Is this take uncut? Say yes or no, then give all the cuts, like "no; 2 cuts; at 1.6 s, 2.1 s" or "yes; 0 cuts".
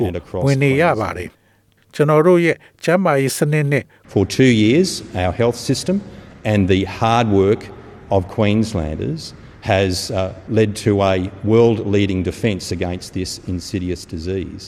no; 2 cuts; at 4.0 s, 10.5 s